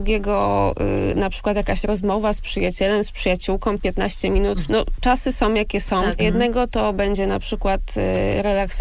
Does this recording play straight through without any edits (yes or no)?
no